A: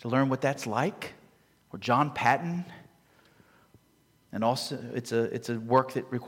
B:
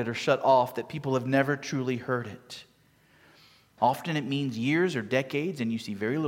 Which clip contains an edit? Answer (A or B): B